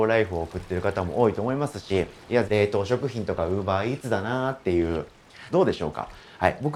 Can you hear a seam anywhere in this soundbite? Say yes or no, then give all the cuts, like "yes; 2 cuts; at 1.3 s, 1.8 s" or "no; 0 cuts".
yes; 2 cuts; at 2.4 s, 5.5 s